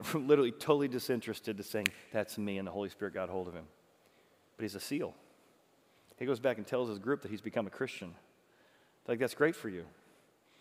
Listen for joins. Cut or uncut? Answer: uncut